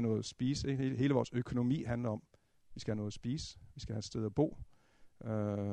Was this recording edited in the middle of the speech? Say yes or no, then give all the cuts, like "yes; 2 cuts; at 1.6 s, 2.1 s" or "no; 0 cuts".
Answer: no; 0 cuts